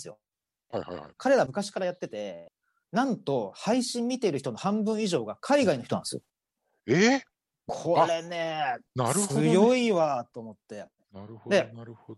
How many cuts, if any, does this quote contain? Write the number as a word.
one